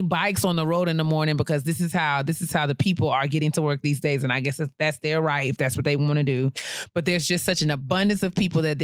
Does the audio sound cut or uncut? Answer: uncut